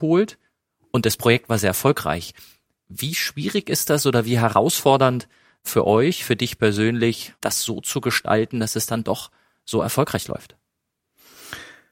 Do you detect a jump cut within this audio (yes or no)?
no